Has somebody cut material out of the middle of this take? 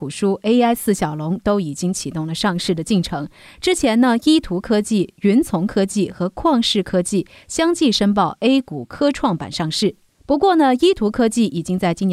no; 0 cuts

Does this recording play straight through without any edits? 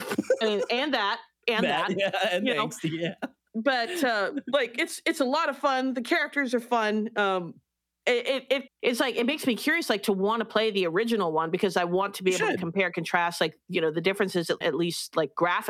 no; 2 cuts; at 8.7 s, 14.6 s

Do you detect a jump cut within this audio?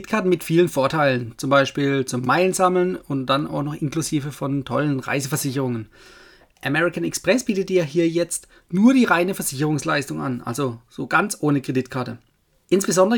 no; 0 cuts

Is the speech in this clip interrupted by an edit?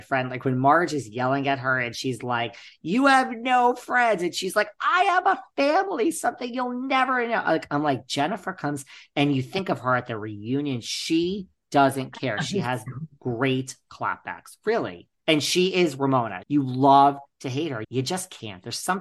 yes; 3 cuts; at 15.2 s, 16.4 s, 17.8 s

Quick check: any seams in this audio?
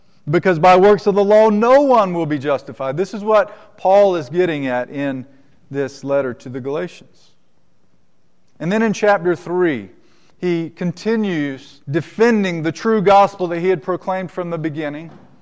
yes; 2 cuts; at 10.3 s, 11.8 s

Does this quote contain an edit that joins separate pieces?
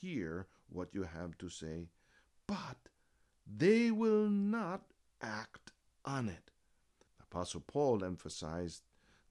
yes; 1 cut; at 7.1 s

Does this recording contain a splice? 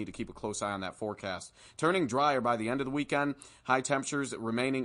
no; 0 cuts

